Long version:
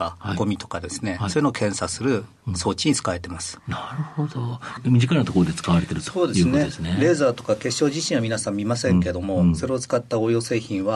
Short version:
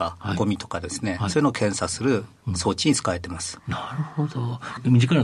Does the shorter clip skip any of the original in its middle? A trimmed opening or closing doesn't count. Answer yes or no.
no